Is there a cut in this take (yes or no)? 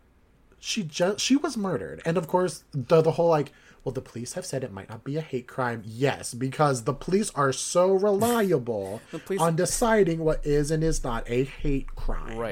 no